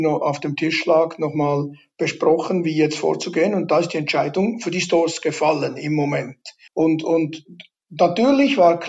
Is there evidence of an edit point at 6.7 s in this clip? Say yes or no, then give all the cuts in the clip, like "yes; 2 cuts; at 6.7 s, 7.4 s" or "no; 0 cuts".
yes; 1 cut; at 6.7 s